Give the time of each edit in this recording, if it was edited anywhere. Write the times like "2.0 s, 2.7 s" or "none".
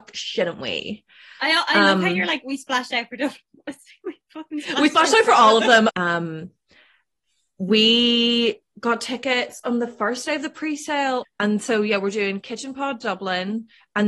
5.9 s, 11.2 s